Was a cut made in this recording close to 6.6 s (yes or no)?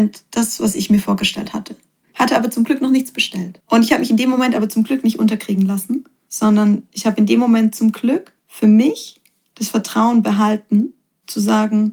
no